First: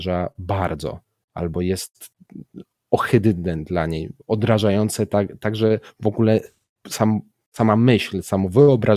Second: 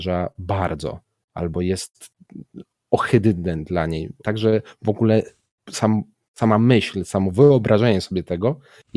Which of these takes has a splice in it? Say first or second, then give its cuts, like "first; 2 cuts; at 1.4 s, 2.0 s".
second; 1 cut; at 4.2 s